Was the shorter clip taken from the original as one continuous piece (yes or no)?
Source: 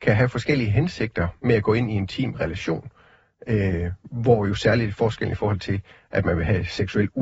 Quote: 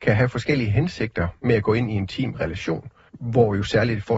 no